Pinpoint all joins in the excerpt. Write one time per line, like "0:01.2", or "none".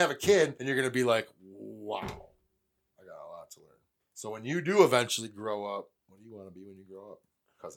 0:04.0
0:06.0